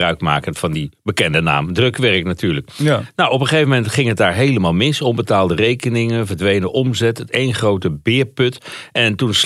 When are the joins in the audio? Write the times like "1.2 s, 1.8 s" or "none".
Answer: none